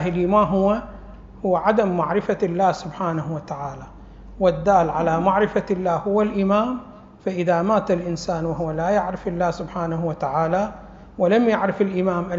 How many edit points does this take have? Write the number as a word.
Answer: zero